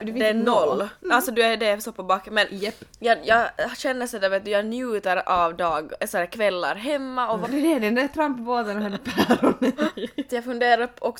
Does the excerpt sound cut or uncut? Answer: cut